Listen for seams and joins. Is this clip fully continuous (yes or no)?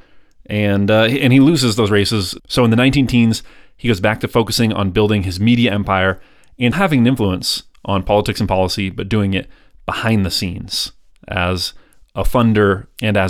no